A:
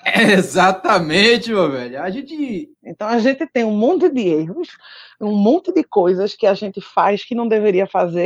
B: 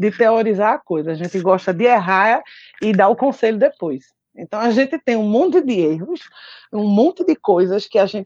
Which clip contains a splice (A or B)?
A